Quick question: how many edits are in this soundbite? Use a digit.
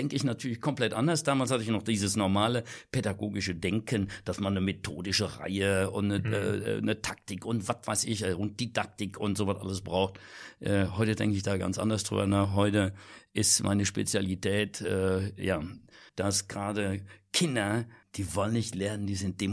2